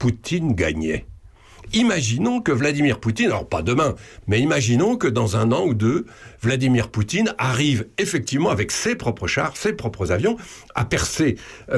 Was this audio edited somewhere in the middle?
yes; 1 cut; at 4.2 s

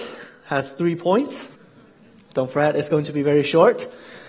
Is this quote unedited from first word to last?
no; 1 cut; at 1.5 s

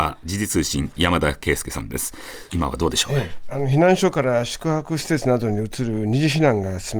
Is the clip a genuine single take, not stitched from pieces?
no; 1 cut; at 2.5 s

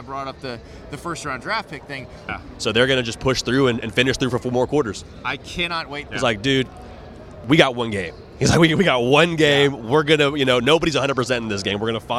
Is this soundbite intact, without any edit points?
no; 2 cuts; at 2.3 s, 6.1 s

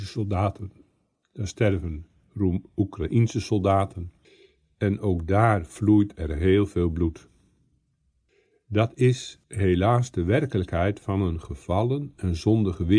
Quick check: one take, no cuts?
yes; 0 cuts

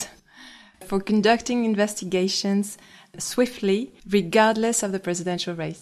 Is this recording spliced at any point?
yes; 1 cut; at 4.0 s

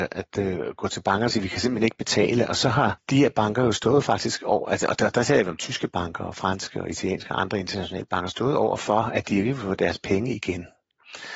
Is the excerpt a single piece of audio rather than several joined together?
yes; 0 cuts

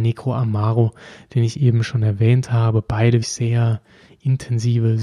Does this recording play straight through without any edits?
no; 1 cut; at 3.2 s

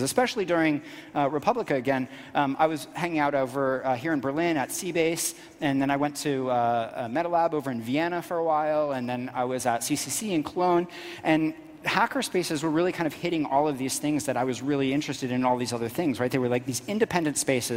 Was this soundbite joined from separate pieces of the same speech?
no; 0 cuts

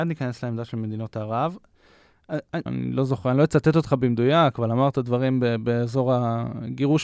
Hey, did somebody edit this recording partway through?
yes; 1 cut; at 2.7 s

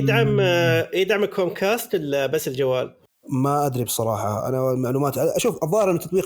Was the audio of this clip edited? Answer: no; 0 cuts

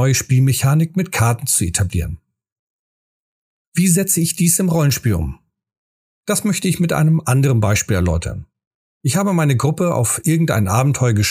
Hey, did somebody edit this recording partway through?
no; 0 cuts

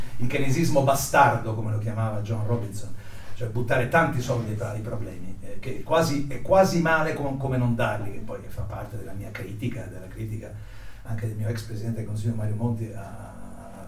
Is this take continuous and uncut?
yes; 0 cuts

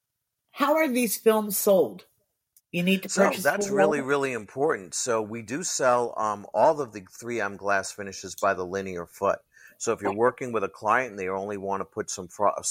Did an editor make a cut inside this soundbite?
no; 0 cuts

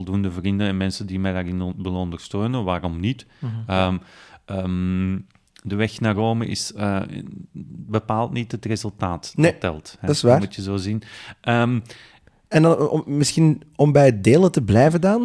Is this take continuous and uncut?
yes; 0 cuts

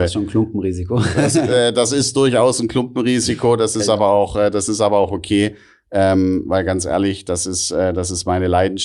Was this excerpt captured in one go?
yes; 0 cuts

